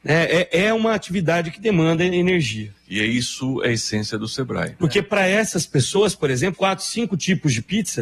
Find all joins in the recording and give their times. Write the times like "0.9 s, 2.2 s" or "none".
4.8 s, 6.5 s